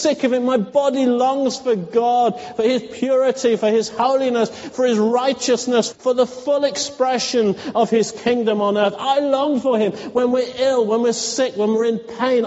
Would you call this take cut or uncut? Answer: cut